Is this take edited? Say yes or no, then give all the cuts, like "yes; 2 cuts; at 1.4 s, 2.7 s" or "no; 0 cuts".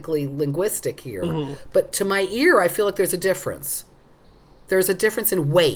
no; 0 cuts